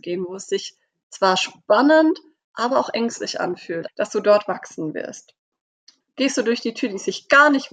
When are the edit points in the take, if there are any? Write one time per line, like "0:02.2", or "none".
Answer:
0:03.9
0:06.0